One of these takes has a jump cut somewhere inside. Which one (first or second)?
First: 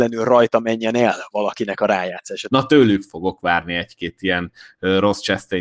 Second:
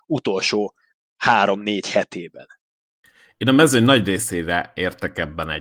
first